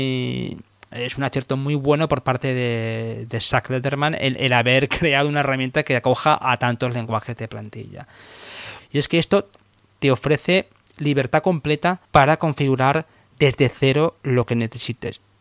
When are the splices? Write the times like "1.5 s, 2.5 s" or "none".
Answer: 8.8 s, 12.0 s